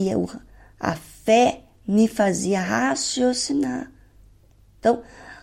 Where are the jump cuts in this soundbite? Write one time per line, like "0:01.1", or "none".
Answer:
none